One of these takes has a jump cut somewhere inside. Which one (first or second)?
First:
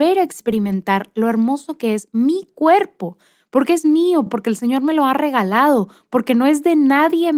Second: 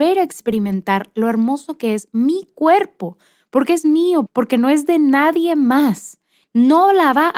second